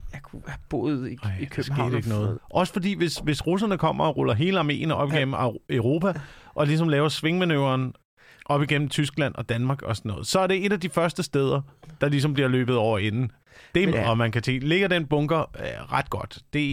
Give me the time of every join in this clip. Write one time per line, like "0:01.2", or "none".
0:02.4
0:13.9